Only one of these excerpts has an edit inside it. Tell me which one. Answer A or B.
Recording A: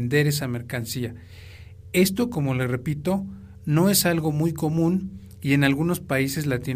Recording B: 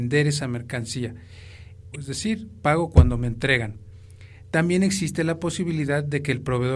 B